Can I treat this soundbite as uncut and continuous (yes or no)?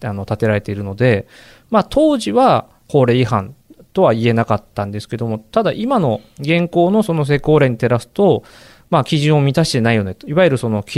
yes